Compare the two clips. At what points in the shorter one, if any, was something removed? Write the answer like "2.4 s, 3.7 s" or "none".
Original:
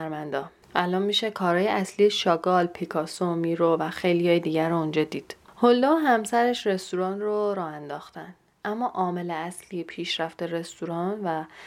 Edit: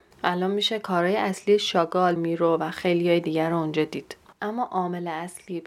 2.2 s, 4.3 s